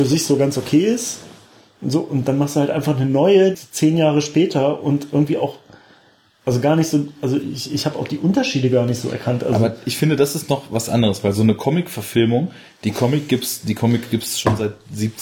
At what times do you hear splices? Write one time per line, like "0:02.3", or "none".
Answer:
0:03.5